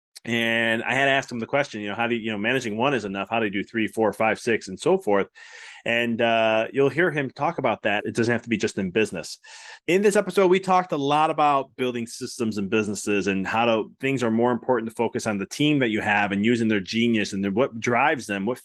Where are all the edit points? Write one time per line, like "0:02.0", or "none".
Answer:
0:08.0
0:09.8